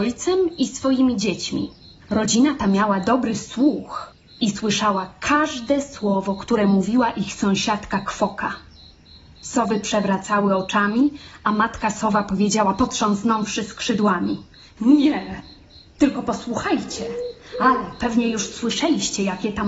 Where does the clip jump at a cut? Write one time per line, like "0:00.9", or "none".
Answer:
none